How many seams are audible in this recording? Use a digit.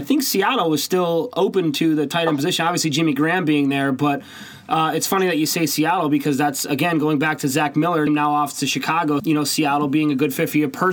2